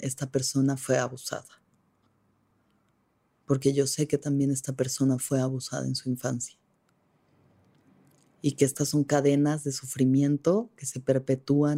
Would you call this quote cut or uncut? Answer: uncut